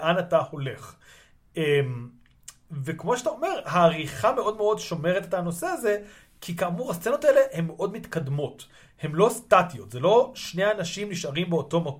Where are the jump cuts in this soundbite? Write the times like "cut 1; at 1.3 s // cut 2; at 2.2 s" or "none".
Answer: none